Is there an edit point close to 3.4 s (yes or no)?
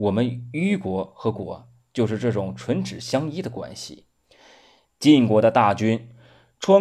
no